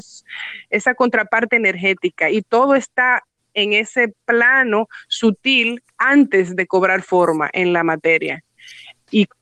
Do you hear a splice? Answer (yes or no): no